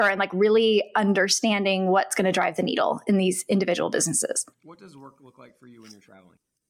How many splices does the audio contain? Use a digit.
1